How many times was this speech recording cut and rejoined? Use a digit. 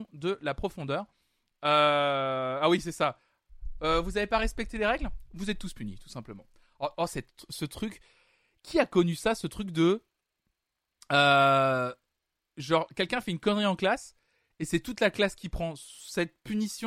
0